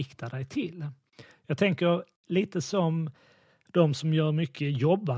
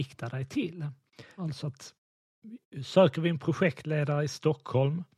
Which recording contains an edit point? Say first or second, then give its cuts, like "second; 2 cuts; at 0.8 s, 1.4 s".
second; 1 cut; at 1.4 s